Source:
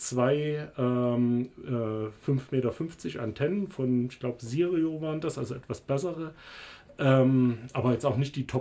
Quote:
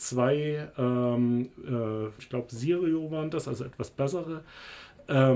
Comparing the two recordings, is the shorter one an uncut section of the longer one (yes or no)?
no